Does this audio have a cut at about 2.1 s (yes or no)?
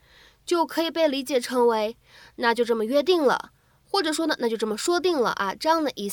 no